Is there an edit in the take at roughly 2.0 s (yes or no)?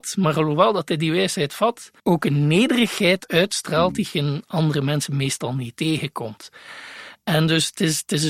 yes